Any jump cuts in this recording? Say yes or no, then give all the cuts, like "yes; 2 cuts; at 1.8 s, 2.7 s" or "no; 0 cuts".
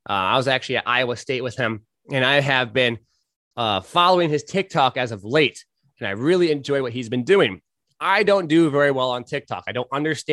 no; 0 cuts